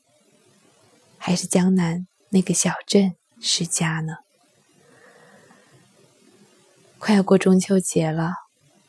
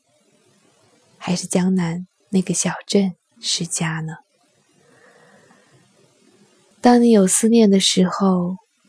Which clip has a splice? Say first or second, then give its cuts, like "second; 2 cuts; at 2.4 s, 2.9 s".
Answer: second; 1 cut; at 6.7 s